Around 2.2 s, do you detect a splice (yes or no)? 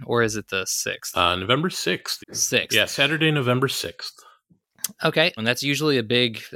yes